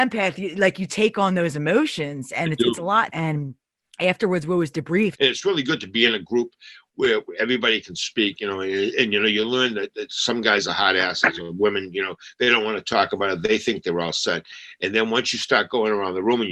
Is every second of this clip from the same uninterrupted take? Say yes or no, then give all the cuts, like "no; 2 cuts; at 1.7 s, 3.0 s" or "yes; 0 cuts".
no; 2 cuts; at 3.1 s, 5.1 s